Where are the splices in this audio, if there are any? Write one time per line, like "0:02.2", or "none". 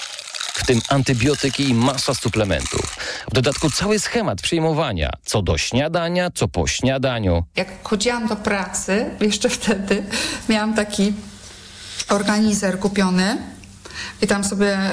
none